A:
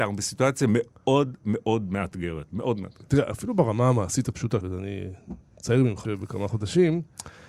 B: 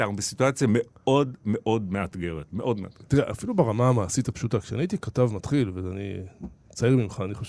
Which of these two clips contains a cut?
A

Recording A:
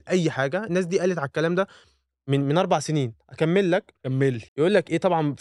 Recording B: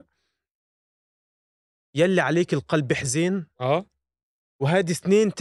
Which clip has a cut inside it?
A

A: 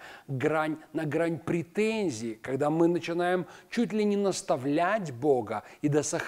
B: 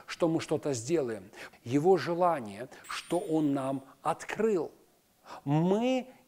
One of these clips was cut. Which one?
B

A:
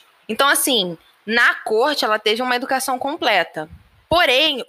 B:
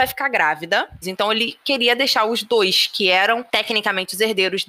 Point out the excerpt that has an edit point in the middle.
B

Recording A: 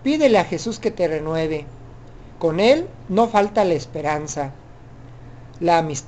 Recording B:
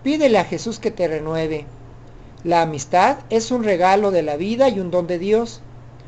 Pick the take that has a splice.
B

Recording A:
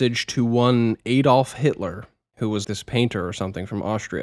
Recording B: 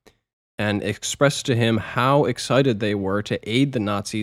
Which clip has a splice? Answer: A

